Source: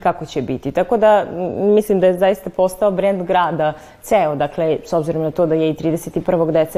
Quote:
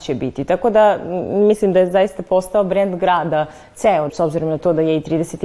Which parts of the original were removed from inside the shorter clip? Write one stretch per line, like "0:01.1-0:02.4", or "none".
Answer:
0:04.4-0:04.8